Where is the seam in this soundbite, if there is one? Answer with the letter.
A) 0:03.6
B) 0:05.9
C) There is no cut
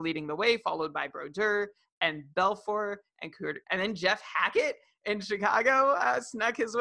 A